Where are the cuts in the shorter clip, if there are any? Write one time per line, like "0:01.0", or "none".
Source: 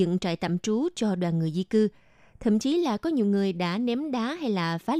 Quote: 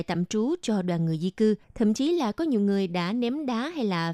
0:01.6